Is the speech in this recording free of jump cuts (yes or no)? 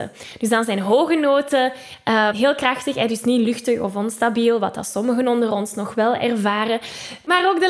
no